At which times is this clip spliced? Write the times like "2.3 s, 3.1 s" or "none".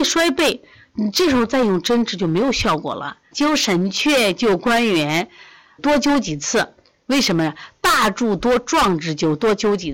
3.3 s, 5.8 s